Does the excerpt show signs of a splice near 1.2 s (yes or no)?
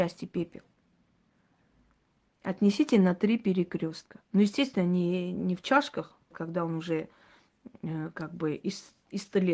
no